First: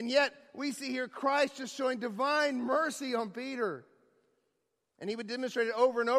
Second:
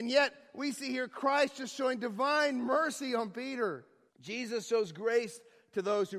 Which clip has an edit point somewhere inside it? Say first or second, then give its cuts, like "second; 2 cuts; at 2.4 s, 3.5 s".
second; 1 cut; at 4.1 s